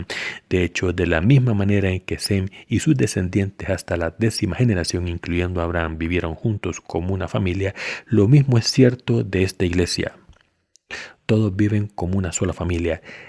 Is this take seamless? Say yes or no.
no